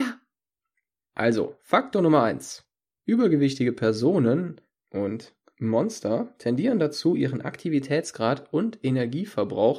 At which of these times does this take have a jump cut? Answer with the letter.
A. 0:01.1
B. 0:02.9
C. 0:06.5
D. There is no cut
D